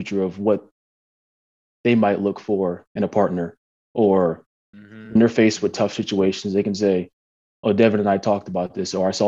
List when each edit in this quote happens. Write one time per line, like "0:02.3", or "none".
none